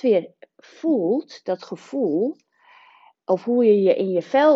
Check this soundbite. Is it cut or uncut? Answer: uncut